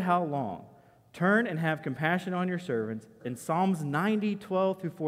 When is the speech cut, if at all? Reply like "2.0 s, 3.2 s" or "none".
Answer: 3.2 s